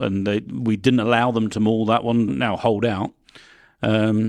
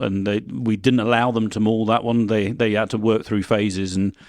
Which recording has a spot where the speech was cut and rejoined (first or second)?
first